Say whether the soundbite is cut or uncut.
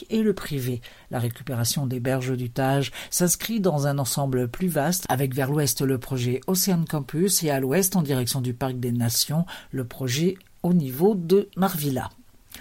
uncut